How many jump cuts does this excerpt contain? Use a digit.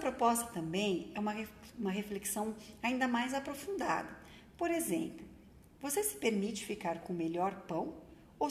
0